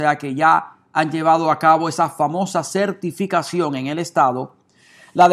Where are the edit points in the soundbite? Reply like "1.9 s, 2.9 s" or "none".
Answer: none